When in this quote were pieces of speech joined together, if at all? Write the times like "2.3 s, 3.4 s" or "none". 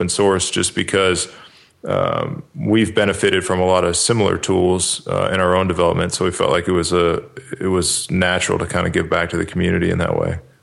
none